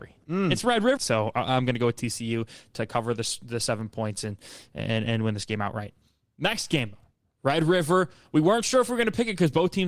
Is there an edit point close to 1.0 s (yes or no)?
yes